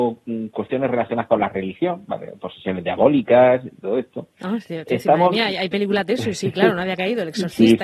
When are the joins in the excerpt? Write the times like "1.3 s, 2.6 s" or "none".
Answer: none

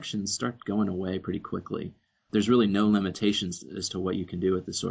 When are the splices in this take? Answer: none

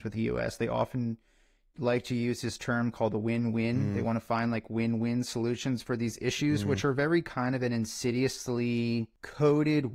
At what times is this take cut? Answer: none

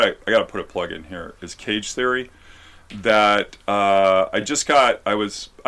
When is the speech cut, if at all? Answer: none

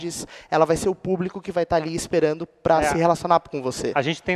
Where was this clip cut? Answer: none

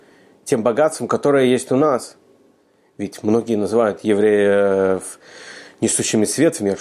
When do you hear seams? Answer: none

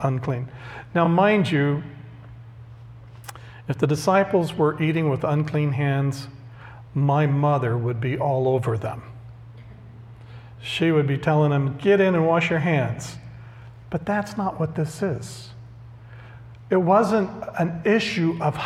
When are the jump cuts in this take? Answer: none

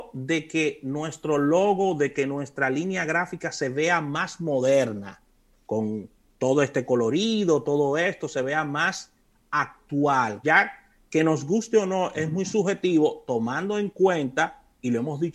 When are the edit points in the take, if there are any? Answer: 10.4 s

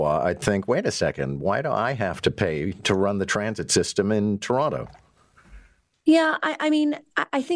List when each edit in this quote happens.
none

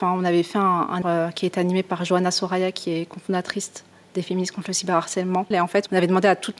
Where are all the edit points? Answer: 1.0 s, 5.5 s

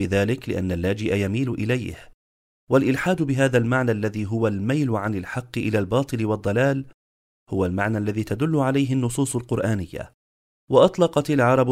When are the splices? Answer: none

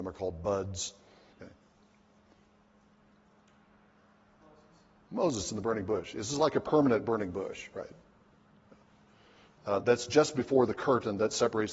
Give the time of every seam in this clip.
1.3 s, 9.6 s

